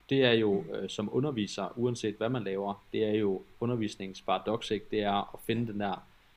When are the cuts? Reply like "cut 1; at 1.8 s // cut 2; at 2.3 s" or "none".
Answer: none